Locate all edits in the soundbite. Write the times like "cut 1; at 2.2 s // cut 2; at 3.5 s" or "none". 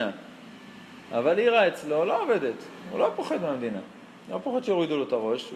none